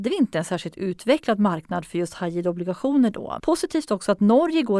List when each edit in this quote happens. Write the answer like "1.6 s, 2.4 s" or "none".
3.4 s